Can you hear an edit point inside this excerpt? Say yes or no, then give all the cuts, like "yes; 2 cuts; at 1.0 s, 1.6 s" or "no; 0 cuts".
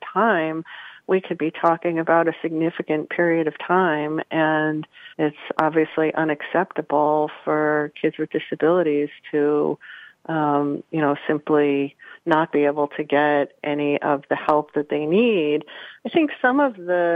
yes; 1 cut; at 5.1 s